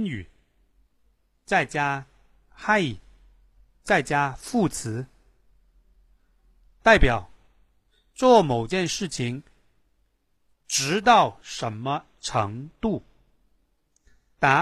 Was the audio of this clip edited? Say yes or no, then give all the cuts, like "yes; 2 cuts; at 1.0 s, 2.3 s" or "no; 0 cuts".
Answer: no; 0 cuts